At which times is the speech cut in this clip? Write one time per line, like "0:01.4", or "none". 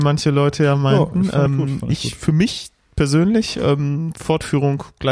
none